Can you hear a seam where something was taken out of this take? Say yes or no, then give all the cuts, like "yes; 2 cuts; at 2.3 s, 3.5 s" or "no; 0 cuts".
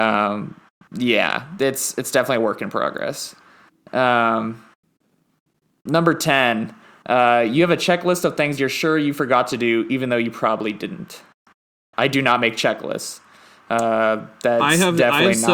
no; 0 cuts